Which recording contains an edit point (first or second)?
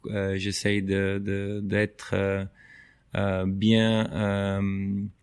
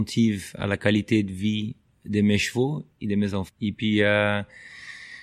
second